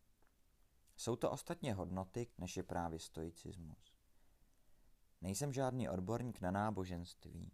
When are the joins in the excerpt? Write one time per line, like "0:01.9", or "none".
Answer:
0:02.3